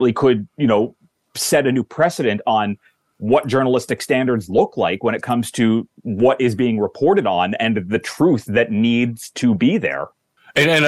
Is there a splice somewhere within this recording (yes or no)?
no